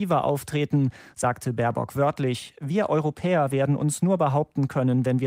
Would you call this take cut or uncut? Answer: uncut